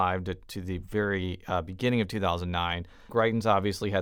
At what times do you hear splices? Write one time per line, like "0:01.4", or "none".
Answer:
0:03.1